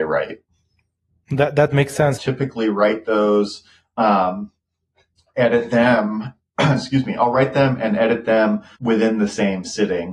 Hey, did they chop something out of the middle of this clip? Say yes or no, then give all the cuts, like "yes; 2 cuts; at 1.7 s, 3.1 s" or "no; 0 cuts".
yes; 2 cuts; at 2.2 s, 8.8 s